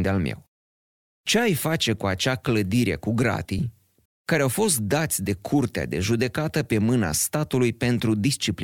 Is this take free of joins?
no; 1 cut; at 4.1 s

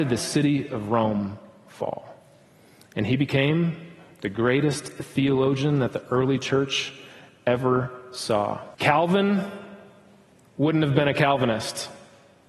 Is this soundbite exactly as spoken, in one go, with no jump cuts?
no; 1 cut; at 8.7 s

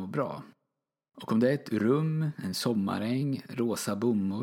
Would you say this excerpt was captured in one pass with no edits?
yes; 0 cuts

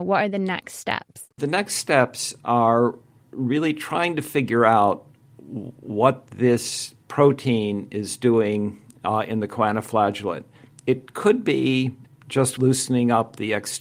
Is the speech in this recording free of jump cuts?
yes; 0 cuts

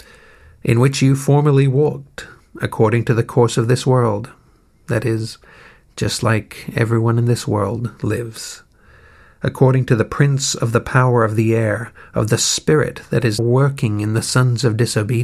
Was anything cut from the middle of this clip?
yes; 1 cut; at 13.4 s

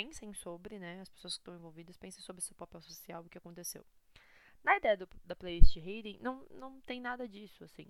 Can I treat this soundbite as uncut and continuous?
yes; 0 cuts

